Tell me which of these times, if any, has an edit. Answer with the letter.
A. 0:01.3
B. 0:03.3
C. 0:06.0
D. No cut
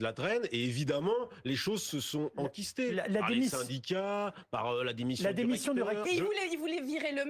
C